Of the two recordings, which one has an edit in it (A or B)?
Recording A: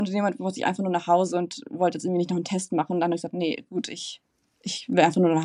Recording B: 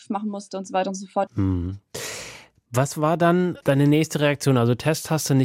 B